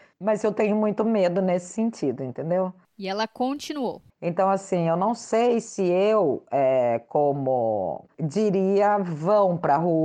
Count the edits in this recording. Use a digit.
2